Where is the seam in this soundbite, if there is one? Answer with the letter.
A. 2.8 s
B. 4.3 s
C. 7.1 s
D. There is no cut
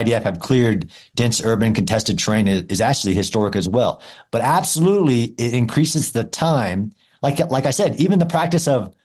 D